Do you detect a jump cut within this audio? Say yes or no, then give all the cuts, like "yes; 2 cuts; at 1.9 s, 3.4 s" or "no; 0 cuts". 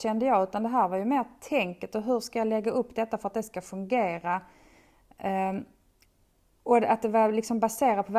no; 0 cuts